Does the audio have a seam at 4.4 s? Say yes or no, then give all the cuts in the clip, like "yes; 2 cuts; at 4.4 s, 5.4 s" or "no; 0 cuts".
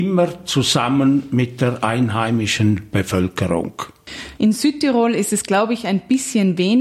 yes; 1 cut; at 4.4 s